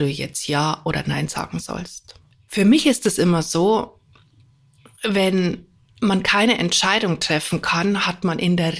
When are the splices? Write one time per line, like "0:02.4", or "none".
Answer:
none